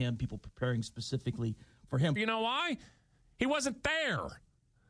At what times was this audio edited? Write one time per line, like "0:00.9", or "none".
0:02.2